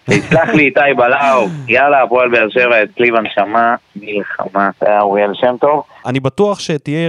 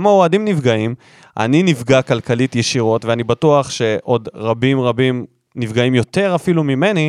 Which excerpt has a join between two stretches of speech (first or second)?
first